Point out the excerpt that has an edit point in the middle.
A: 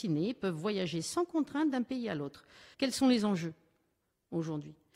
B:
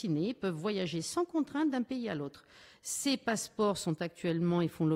A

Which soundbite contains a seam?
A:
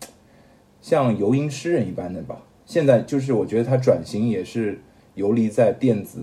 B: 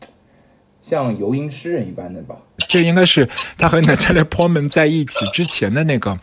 B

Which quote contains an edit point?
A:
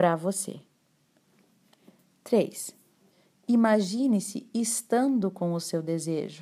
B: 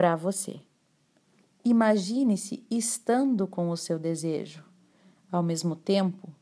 B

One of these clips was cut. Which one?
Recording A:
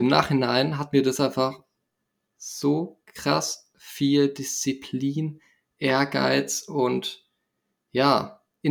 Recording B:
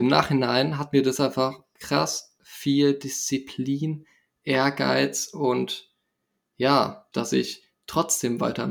B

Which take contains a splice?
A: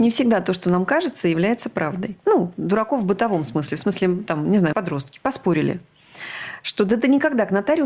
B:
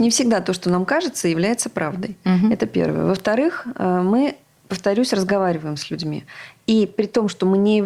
A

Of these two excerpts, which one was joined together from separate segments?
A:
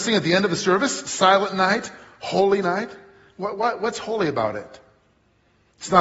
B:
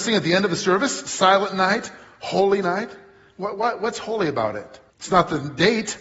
B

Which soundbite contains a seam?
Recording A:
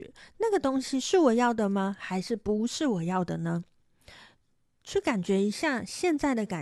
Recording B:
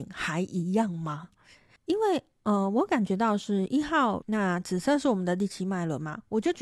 B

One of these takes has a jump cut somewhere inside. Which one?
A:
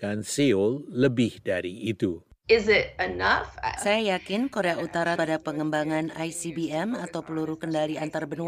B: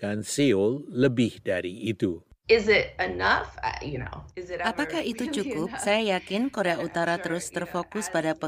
A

